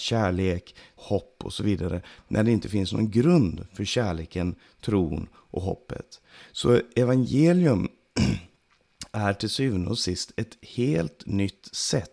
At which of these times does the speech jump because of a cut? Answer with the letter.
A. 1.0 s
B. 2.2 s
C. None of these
A